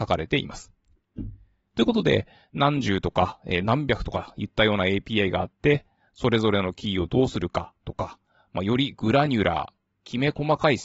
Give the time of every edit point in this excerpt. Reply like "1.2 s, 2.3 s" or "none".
1.7 s